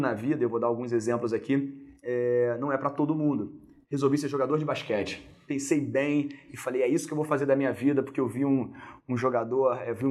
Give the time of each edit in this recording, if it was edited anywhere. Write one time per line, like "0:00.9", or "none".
0:03.8